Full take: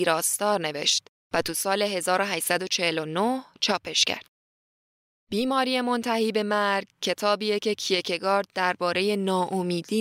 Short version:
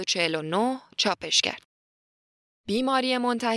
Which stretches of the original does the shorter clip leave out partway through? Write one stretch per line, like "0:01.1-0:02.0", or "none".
none